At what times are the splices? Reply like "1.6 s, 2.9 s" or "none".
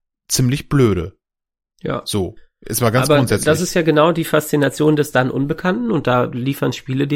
none